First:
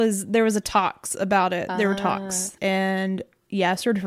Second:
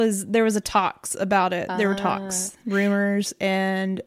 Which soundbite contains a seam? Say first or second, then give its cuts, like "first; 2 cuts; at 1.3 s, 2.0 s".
first; 1 cut; at 2.6 s